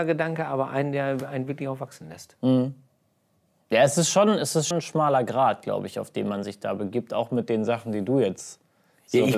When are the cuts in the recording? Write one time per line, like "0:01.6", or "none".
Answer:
0:04.7